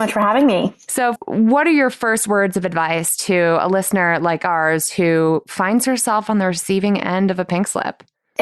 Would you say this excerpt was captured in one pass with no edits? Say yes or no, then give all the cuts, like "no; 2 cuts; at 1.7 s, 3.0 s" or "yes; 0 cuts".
no; 1 cut; at 1.2 s